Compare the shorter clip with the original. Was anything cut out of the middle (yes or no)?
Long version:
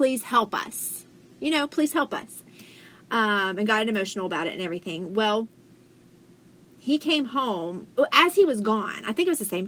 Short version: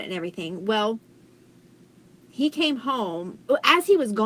no